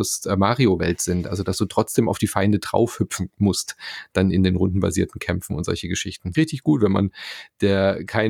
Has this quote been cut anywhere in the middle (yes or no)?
yes